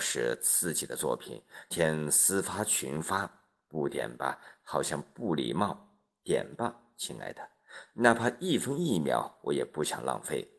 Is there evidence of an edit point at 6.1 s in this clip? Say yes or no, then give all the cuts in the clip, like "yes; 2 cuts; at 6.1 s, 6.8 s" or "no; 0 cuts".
no; 2 cuts; at 1.7 s, 7.9 s